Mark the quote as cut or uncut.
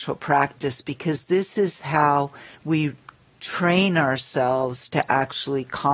cut